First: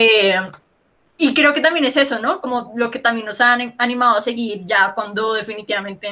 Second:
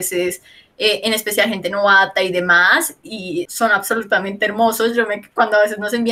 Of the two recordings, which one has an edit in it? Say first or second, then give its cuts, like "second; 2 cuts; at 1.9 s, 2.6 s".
second; 1 cut; at 3.5 s